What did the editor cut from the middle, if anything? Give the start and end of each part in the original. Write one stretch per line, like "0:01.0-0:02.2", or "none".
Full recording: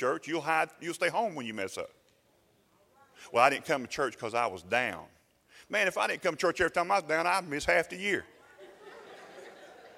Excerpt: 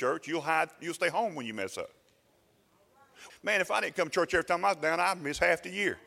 0:03.3-0:05.6